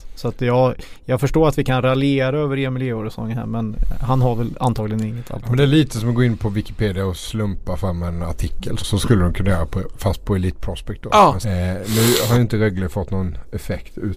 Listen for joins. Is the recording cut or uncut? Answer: cut